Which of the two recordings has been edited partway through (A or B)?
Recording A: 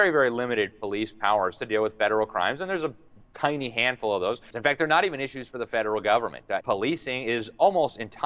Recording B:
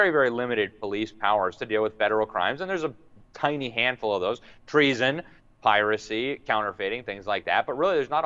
A